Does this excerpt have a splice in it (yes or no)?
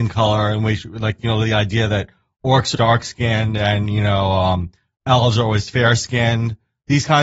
yes